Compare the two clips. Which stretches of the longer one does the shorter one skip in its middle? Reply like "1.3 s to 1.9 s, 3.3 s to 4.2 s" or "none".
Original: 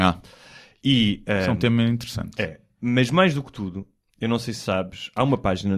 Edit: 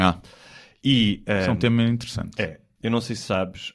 2.8 s to 4.1 s